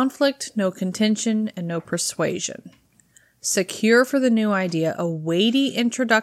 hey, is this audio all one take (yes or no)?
yes